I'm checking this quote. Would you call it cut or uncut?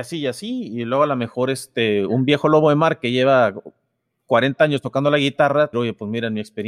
cut